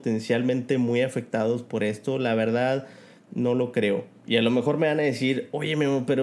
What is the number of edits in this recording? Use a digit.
1